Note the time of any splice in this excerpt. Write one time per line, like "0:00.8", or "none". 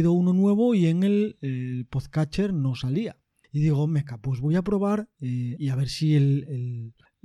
0:03.4
0:05.6